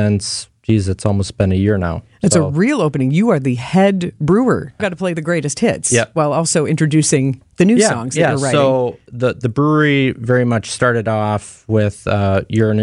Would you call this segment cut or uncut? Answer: cut